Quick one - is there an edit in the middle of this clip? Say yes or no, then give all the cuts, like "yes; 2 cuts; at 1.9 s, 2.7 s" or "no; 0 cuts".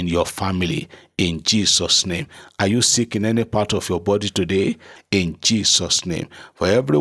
yes; 1 cut; at 5.0 s